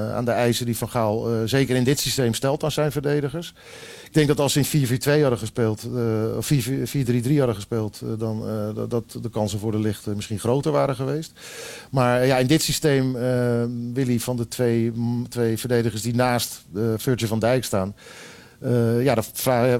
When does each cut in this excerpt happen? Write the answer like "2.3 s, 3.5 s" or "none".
none